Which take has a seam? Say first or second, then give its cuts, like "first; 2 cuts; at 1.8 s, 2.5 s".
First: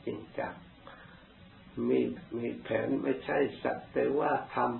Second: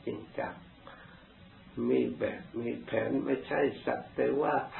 first; 1 cut; at 2.2 s